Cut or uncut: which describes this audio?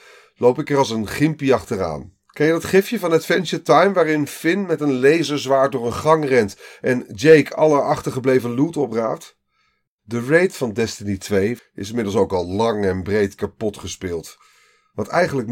cut